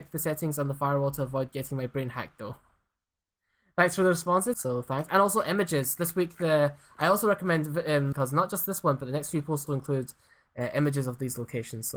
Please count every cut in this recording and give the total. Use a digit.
3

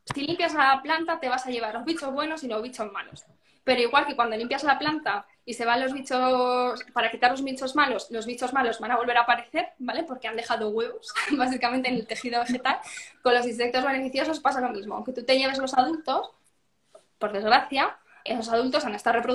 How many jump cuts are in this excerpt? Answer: 1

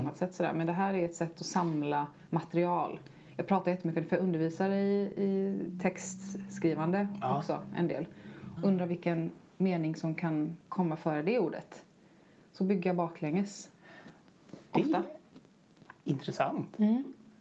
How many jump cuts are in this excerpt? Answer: 2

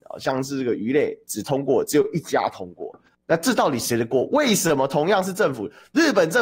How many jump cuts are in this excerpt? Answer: 1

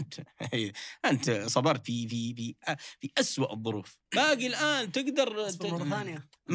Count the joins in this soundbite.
2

